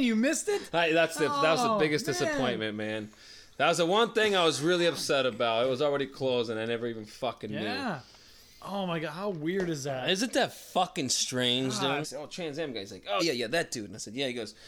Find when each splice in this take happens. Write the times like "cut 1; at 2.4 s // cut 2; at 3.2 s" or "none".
cut 1; at 12.0 s // cut 2; at 13.2 s